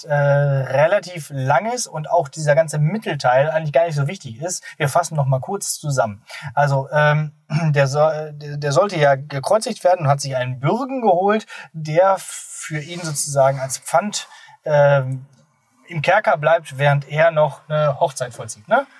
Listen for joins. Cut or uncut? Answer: uncut